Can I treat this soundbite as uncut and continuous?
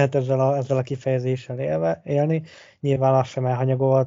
yes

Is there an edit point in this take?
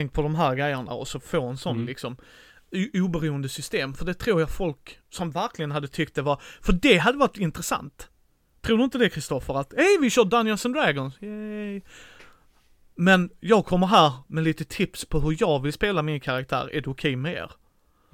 no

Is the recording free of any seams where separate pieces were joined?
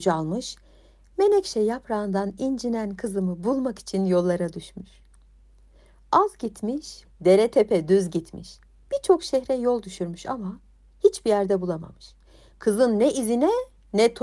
no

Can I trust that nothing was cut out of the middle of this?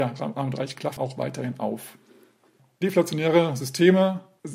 no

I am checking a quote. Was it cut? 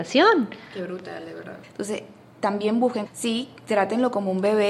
yes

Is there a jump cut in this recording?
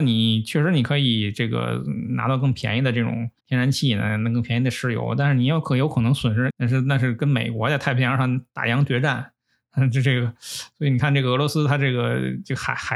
yes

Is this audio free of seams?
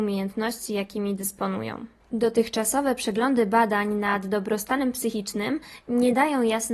no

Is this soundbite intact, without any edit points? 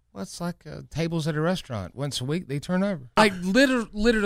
no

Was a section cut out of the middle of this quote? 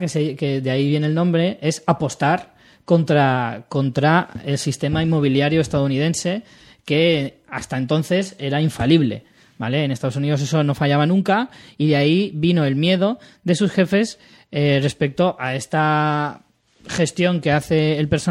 no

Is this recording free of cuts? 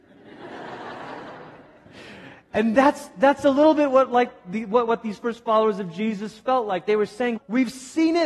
no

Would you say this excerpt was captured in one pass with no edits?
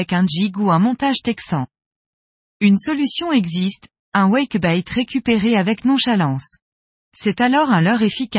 yes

